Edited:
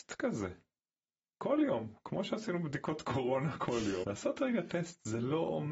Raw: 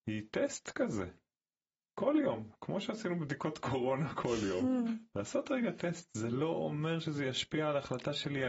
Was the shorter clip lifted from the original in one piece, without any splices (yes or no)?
no